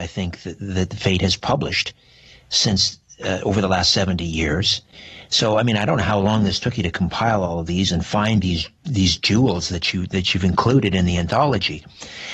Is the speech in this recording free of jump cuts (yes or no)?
yes